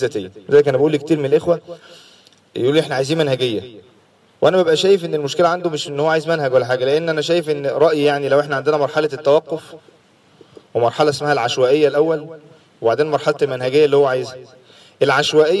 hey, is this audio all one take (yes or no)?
yes